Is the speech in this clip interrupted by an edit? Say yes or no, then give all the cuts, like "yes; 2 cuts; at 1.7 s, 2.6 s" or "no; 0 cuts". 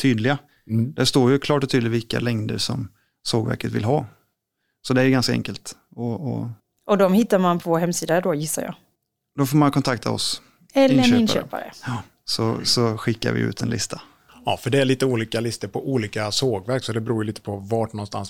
no; 0 cuts